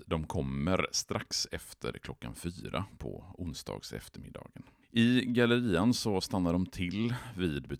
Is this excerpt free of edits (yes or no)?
no